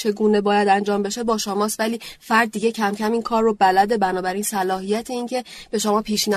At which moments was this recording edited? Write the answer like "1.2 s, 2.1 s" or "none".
none